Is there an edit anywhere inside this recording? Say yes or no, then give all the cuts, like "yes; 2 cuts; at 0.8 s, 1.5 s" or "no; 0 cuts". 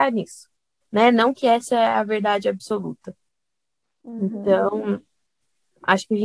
no; 0 cuts